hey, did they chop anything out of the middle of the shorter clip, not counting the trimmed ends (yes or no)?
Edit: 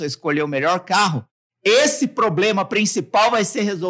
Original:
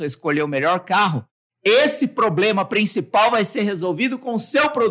no